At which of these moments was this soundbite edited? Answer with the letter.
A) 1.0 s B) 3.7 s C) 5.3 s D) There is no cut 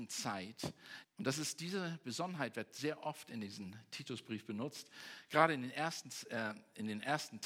A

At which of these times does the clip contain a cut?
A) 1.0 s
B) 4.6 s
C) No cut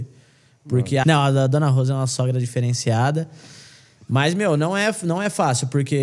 A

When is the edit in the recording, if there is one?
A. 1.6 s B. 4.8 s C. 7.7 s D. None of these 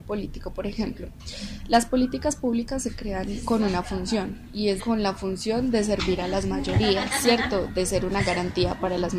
B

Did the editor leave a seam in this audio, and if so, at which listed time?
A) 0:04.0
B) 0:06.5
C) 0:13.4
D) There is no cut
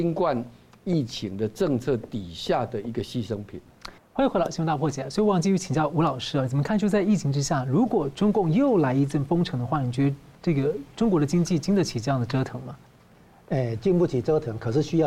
A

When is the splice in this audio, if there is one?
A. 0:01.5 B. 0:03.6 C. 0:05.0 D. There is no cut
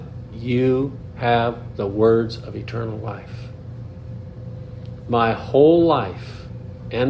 D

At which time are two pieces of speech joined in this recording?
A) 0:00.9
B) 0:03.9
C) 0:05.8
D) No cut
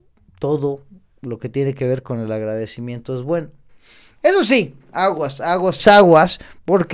C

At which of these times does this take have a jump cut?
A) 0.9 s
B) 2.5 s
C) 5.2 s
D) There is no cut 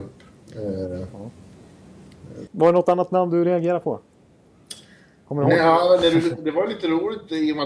B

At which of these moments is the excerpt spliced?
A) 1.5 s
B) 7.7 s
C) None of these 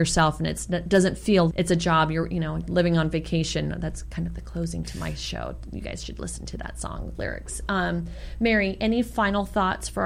A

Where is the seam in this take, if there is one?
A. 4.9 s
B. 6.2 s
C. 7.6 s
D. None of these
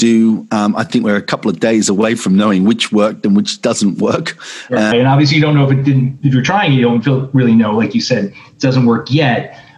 A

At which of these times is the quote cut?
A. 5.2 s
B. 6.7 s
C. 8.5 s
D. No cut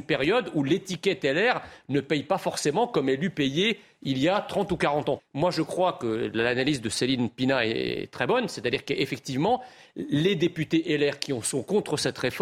A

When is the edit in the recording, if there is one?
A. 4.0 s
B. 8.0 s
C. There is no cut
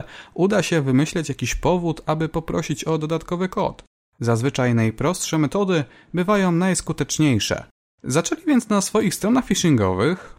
A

